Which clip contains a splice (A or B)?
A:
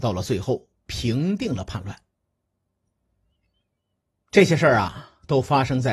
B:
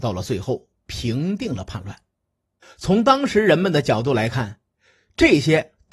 B